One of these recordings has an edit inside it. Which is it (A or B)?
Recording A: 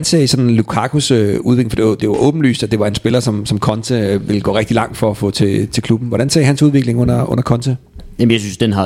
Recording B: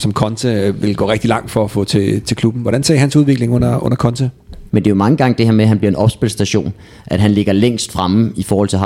B